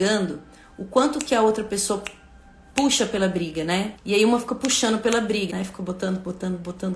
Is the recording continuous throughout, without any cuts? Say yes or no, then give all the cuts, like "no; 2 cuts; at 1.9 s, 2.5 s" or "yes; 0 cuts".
no; 2 cuts; at 3.9 s, 5.5 s